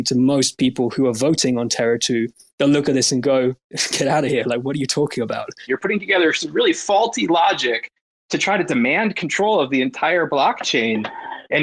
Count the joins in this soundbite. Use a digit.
1